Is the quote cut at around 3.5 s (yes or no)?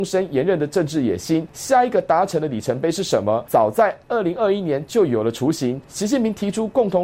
no